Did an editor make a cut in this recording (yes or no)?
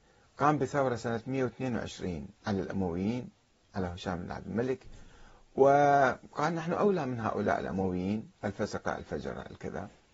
yes